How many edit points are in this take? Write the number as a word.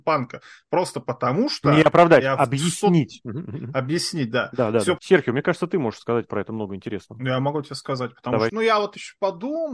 two